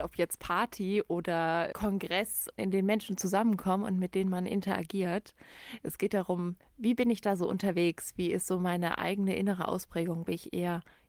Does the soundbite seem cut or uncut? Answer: cut